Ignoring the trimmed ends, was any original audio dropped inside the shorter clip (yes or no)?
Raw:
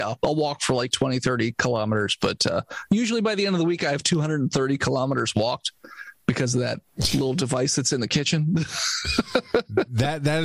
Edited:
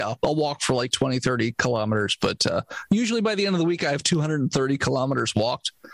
no